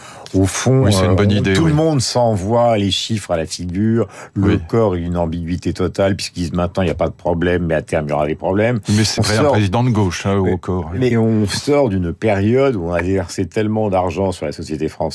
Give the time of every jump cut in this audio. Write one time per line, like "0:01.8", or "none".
0:09.2
0:11.1

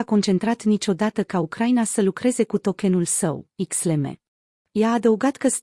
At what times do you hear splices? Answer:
0:04.6

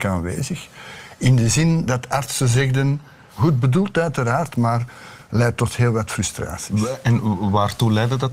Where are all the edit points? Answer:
0:03.3

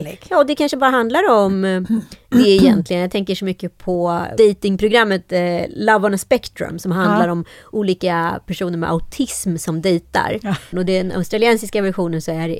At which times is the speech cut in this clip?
0:10.7

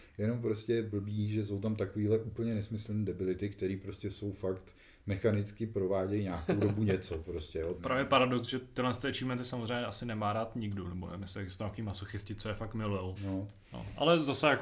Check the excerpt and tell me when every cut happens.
0:07.8
0:13.2

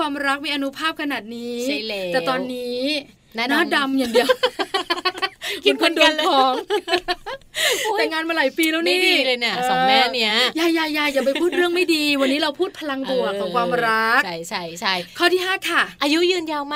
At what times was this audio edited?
none

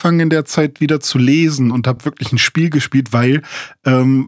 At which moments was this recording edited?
none

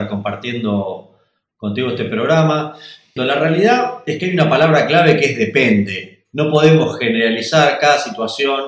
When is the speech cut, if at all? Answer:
0:03.2

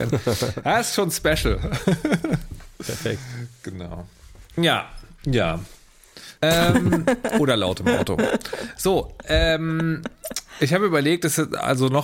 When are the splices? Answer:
0:06.4

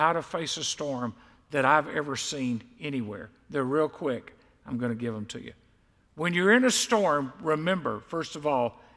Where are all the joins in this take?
none

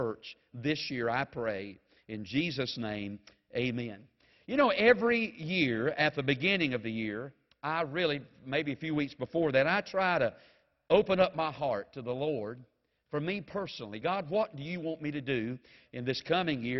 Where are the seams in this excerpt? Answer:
none

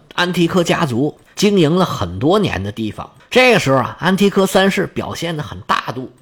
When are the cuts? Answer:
0:03.2

